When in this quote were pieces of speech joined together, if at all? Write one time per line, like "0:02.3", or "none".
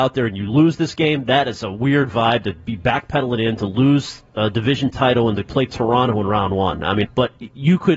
0:07.0